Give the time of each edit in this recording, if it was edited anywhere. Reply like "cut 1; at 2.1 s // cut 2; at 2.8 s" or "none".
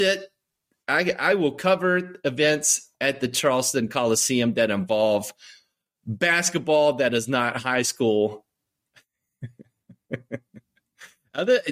none